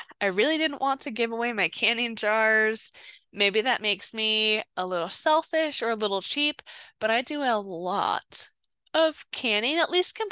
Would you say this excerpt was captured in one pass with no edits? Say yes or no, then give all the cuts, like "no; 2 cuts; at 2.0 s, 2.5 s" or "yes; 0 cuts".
yes; 0 cuts